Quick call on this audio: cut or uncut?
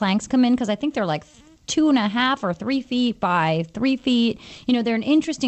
uncut